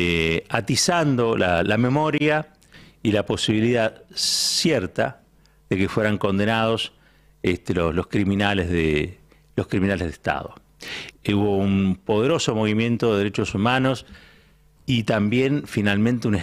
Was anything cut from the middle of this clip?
yes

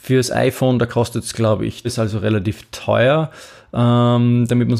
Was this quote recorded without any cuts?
no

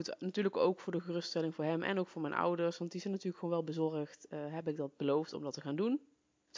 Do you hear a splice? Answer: no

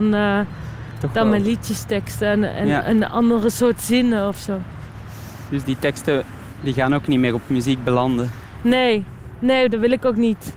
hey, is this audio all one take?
yes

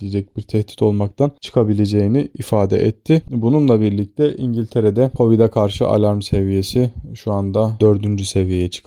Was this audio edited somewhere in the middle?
yes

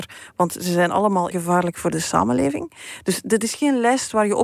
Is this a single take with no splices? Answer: no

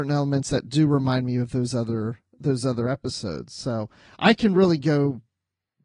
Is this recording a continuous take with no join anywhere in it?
yes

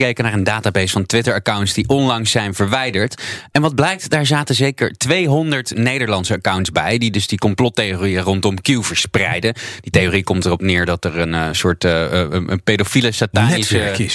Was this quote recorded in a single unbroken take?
yes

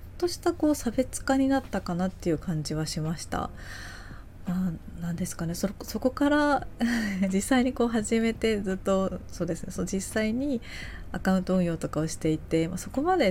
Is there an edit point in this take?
no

